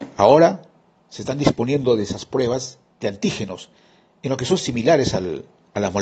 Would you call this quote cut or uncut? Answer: uncut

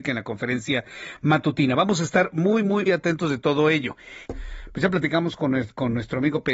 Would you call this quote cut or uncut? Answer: cut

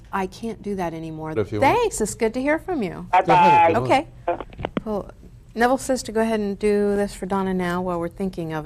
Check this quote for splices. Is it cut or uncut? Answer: cut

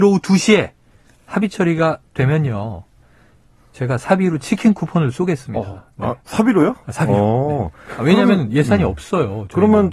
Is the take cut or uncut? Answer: uncut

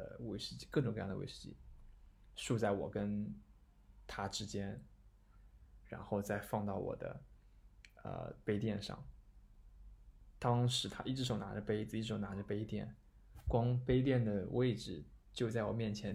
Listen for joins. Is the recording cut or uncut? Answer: cut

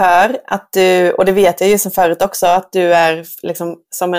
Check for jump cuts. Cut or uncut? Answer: uncut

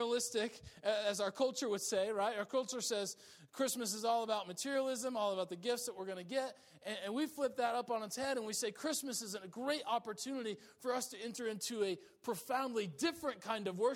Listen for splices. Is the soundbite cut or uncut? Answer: uncut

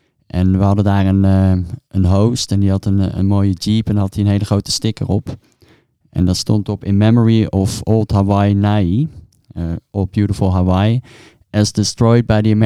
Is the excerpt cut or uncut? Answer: uncut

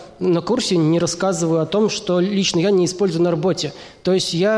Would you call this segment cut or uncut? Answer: uncut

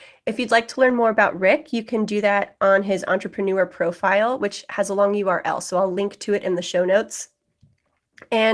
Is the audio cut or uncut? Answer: uncut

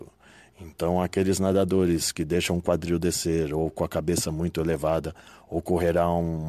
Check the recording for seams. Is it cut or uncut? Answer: uncut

